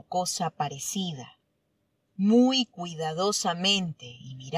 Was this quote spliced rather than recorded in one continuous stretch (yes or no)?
yes